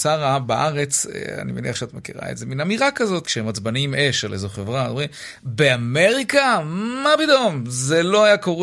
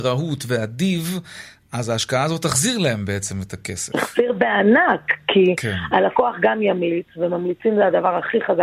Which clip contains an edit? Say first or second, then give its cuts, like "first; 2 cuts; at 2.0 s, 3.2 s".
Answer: first; 1 cut; at 3.2 s